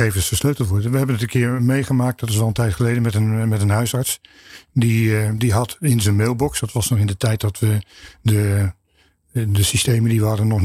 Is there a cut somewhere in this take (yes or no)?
no